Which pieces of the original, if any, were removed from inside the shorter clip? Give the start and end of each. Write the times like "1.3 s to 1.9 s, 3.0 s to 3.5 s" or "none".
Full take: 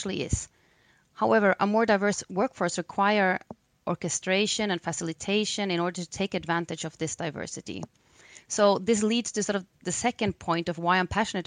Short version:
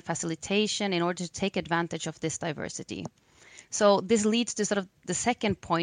none